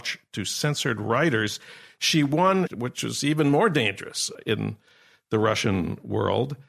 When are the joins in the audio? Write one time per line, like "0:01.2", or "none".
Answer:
0:02.7